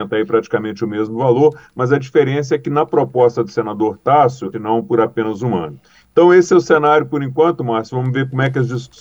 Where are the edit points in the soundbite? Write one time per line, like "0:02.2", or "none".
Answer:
0:04.5